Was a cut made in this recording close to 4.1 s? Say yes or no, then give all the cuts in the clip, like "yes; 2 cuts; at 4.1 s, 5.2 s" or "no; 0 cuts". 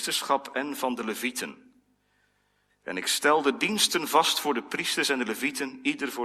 no; 1 cut; at 2.7 s